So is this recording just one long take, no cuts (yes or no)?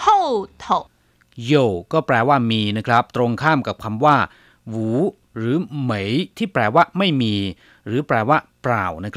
yes